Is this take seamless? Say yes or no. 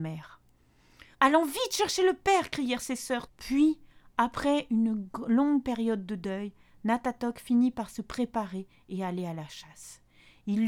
no